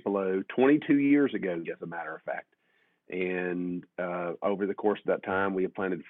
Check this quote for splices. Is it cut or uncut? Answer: cut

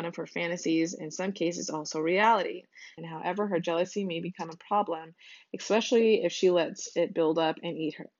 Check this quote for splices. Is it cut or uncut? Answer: cut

